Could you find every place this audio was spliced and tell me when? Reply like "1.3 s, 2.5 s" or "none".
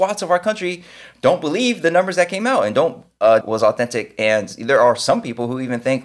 3.4 s